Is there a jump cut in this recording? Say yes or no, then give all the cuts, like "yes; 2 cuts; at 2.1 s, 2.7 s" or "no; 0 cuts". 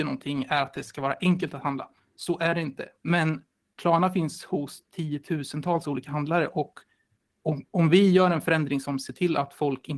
no; 0 cuts